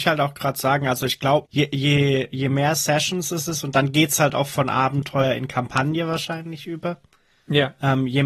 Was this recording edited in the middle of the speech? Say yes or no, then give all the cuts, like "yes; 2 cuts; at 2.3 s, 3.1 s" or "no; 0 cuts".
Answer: yes; 1 cut; at 1.4 s